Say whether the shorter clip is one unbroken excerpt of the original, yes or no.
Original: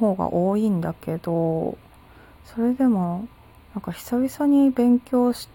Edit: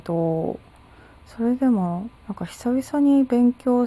no